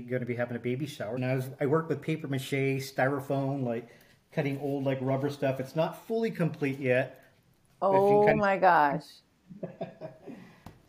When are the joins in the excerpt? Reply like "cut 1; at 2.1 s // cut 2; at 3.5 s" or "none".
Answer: cut 1; at 1.2 s

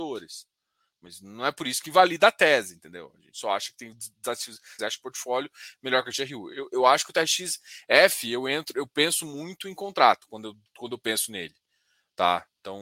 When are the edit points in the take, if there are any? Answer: cut 1; at 4.8 s

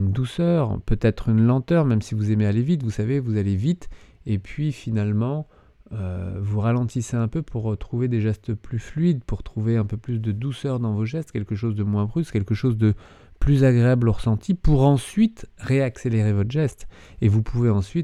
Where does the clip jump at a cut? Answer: none

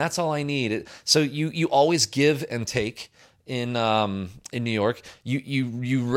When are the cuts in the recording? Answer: none

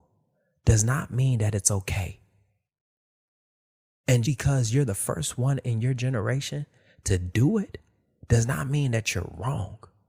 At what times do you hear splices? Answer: cut 1; at 4.2 s

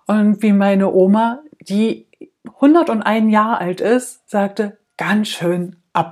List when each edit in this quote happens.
none

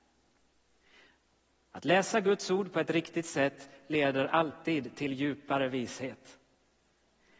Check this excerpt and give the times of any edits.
none

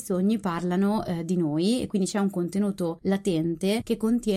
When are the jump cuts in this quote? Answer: none

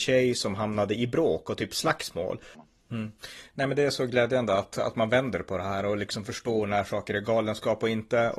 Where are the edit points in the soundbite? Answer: cut 1; at 2.5 s

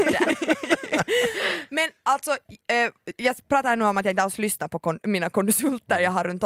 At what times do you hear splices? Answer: none

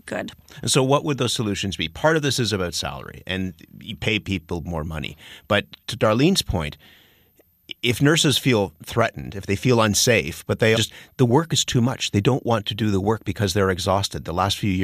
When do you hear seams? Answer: cut 1; at 10.7 s

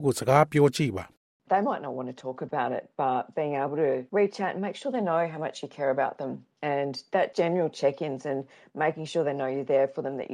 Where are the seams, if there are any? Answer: cut 1; at 4.1 s // cut 2; at 7.3 s

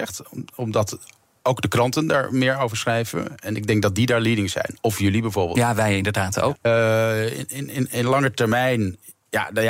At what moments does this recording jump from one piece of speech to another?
cut 1; at 6.6 s

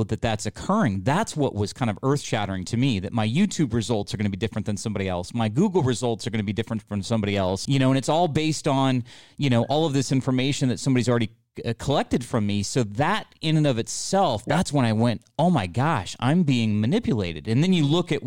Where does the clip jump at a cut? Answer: cut 1; at 7.6 s

